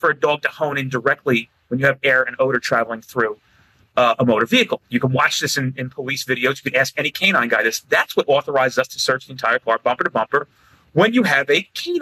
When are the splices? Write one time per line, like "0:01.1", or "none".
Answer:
none